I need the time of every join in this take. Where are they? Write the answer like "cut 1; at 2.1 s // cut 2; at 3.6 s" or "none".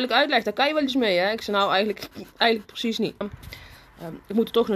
cut 1; at 3.2 s